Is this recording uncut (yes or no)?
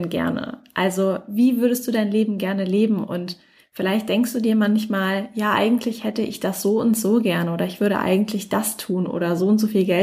yes